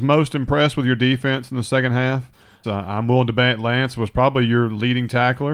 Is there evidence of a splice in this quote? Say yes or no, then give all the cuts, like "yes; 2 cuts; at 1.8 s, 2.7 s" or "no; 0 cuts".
yes; 1 cut; at 2.6 s